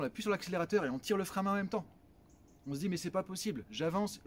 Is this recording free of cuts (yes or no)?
yes